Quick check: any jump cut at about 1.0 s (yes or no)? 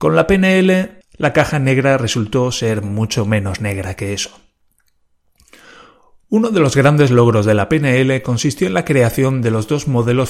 yes